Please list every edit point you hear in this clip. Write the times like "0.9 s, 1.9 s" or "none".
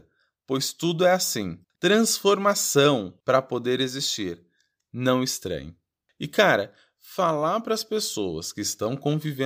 1.7 s